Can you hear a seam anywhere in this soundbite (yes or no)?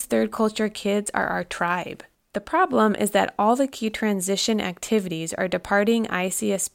yes